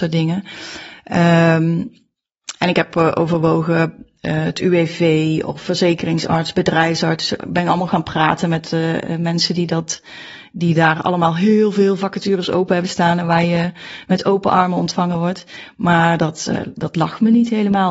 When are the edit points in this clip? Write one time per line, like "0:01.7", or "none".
none